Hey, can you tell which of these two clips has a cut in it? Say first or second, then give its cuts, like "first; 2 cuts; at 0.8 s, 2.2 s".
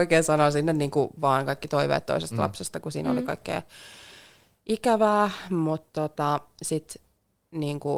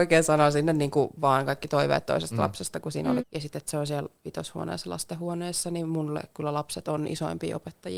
second; 1 cut; at 3.2 s